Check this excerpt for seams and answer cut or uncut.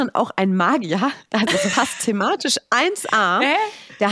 uncut